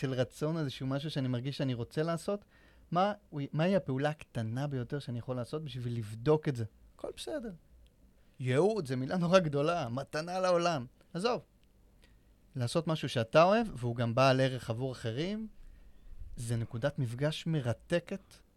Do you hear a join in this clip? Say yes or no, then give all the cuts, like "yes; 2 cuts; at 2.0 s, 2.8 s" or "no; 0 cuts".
no; 0 cuts